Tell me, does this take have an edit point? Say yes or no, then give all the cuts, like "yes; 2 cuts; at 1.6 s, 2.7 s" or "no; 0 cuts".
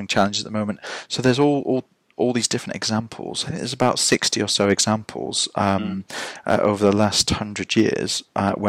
no; 0 cuts